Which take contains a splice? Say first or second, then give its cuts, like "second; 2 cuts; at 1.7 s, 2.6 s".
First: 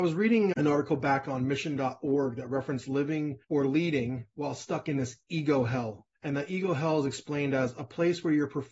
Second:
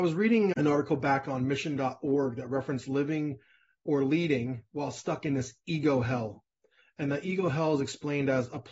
first; 2 cuts; at 3.4 s, 6.1 s